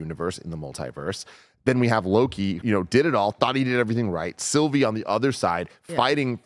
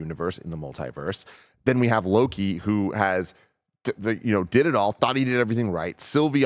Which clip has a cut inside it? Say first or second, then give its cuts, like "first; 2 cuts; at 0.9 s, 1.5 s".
first; 1 cut; at 2.6 s